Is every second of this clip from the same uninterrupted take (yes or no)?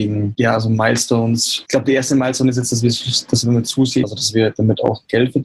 no